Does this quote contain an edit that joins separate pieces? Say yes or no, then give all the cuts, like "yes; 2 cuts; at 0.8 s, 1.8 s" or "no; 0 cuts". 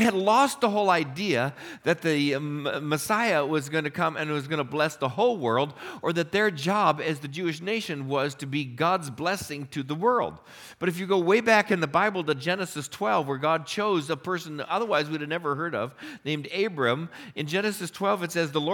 no; 0 cuts